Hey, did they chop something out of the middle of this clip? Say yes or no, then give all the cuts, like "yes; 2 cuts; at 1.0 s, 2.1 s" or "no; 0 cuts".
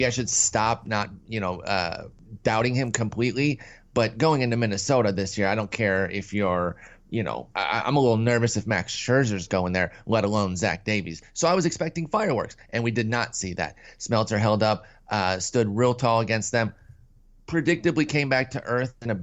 yes; 1 cut; at 7.5 s